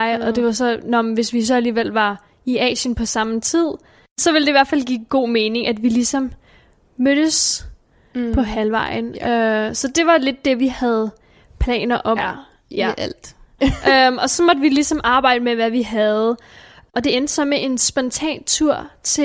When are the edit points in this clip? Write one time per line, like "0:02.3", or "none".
0:12.2
0:13.6